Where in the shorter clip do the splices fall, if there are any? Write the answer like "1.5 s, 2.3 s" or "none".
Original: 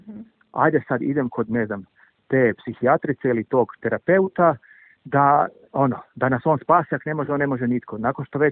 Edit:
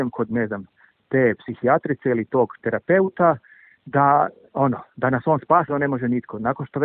5.7 s